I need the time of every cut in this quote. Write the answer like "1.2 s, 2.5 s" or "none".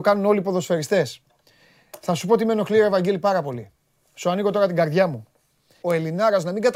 5.8 s

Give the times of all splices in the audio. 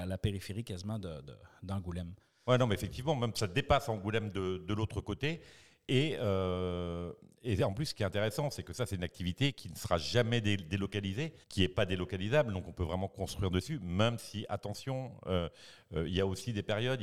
11.4 s

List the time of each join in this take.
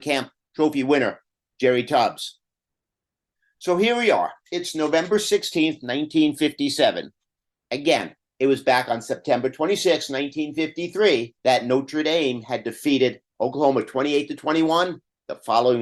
7.6 s, 11.4 s

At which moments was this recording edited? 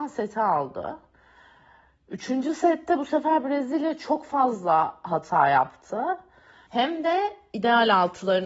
6.7 s

